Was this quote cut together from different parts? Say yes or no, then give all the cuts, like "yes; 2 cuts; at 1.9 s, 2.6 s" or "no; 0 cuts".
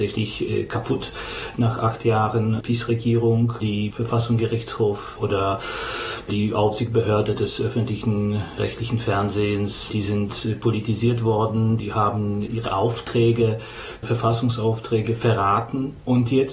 no; 0 cuts